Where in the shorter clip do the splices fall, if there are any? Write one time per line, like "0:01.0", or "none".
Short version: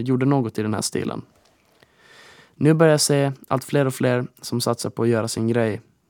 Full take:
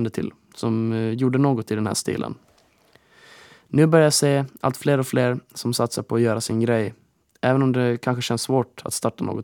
none